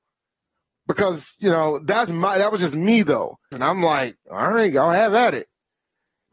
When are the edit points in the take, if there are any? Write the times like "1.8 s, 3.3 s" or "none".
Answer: 2.1 s, 3.5 s